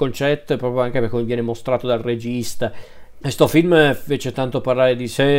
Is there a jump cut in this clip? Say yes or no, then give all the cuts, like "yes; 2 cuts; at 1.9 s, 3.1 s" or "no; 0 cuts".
yes; 1 cut; at 3.2 s